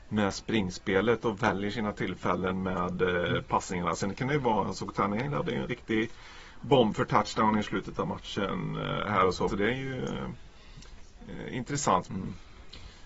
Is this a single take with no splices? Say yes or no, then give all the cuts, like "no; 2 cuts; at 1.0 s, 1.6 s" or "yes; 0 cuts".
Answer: no; 2 cuts; at 9.5 s, 12.1 s